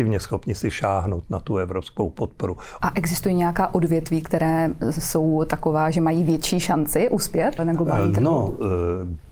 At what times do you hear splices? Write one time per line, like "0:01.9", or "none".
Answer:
0:02.8
0:07.6

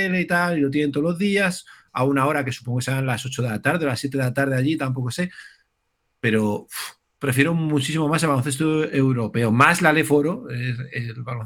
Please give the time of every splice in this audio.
none

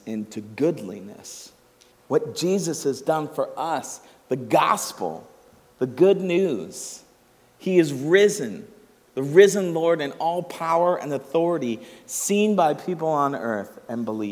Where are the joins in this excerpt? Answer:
0:01.9

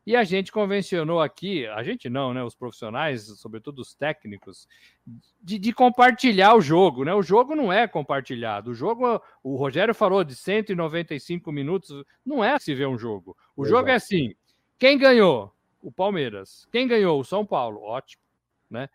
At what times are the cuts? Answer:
0:12.6

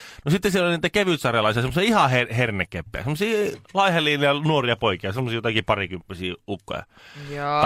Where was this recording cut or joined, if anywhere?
none

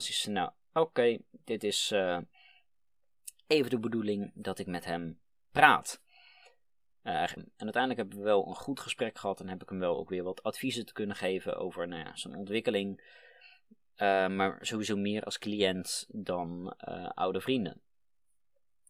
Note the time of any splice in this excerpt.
0:07.4

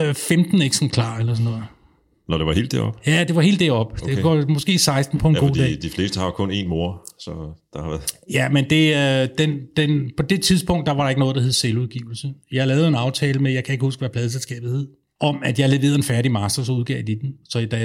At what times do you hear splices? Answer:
none

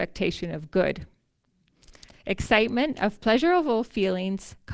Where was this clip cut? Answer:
0:02.1

